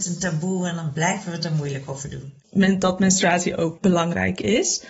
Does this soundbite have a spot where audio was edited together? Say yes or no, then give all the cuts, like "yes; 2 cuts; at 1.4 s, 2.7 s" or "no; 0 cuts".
yes; 2 cuts; at 2.4 s, 3.8 s